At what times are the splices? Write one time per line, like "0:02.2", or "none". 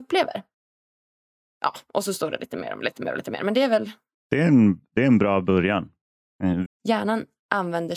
0:04.2
0:06.7